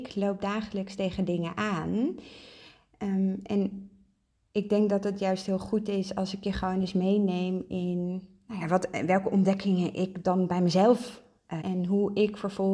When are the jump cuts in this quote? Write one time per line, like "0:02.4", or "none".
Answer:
0:08.6
0:11.6